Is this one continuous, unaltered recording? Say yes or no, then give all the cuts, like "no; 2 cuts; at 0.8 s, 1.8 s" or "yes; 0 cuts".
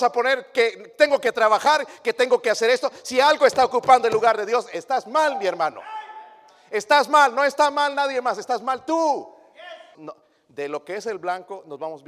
no; 1 cut; at 9.9 s